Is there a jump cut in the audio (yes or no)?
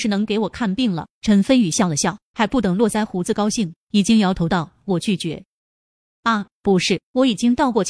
no